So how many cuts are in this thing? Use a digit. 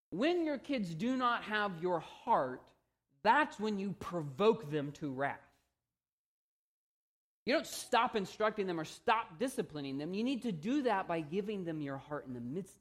0